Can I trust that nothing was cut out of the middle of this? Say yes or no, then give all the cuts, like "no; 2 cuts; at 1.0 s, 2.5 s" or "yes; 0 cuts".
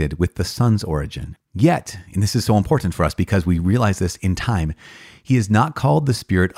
no; 1 cut; at 1.4 s